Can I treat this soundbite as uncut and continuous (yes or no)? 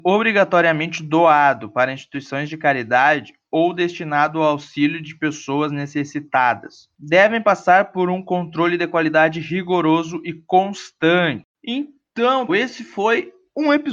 no